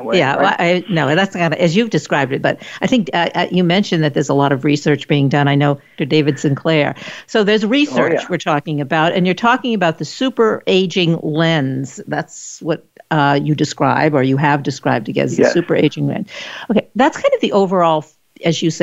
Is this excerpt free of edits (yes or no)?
no